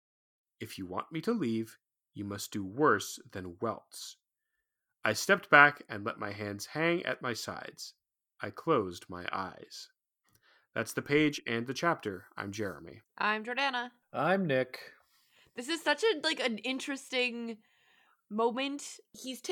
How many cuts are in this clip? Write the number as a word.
zero